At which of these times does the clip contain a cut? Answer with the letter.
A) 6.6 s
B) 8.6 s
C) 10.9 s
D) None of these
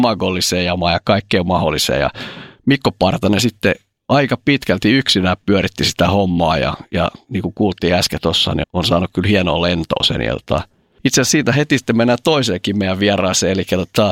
B